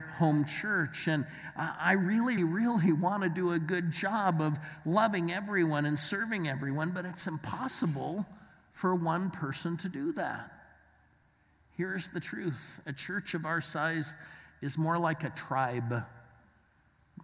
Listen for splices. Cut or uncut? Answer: cut